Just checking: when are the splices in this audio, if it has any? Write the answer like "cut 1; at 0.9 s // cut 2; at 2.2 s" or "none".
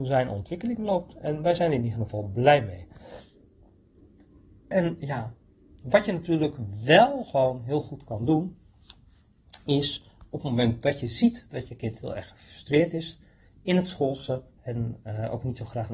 none

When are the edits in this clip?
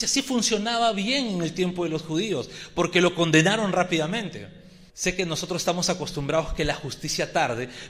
cut 1; at 4.9 s

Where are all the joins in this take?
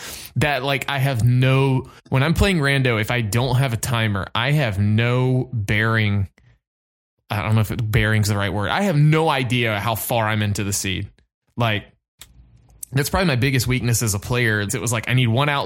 cut 1; at 2.0 s // cut 2; at 14.7 s

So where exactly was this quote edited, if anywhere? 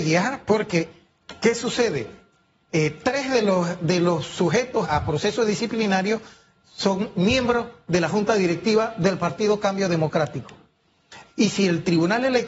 cut 1; at 4.8 s // cut 2; at 11.3 s

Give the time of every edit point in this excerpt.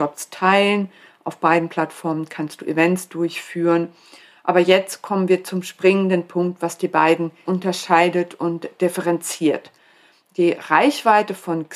cut 1; at 7.4 s

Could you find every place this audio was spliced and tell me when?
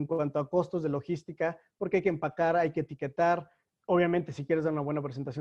none

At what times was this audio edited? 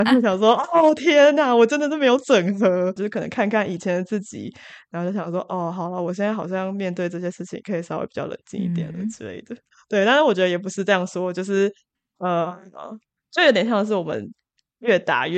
cut 1; at 3.0 s // cut 2; at 9.7 s

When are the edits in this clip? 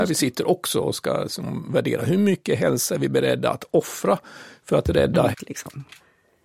cut 1; at 5.3 s

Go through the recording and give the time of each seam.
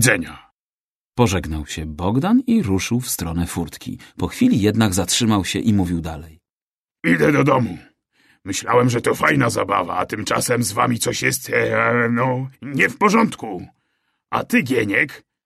cut 1; at 12.5 s

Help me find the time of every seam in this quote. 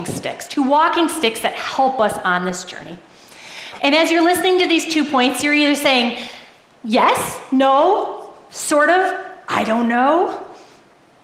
cut 1; at 3.8 s

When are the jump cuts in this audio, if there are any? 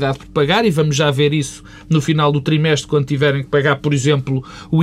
none

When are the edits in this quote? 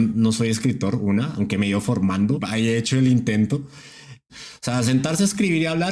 cut 1; at 2.4 s // cut 2; at 4.3 s

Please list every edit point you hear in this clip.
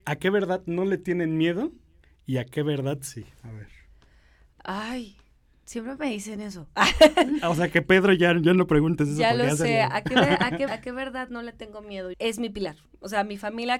cut 1; at 10.7 s // cut 2; at 12.1 s

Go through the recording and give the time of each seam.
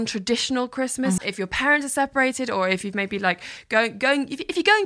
cut 1; at 1.2 s

